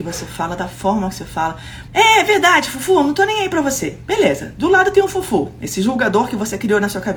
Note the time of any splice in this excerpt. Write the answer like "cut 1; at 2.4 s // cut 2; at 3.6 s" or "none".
cut 1; at 1.9 s